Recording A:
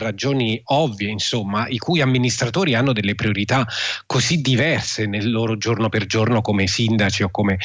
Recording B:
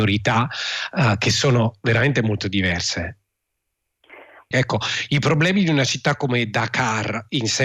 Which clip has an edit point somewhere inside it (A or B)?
B